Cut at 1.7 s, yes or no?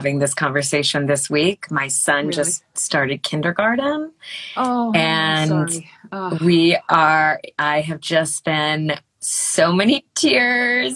no